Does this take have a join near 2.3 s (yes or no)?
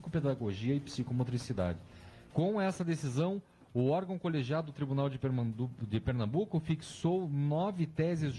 yes